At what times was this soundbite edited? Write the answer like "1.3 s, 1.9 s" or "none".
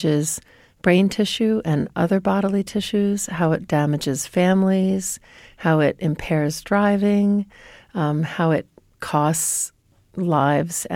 none